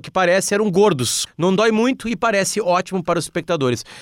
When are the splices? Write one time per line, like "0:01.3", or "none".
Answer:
0:01.3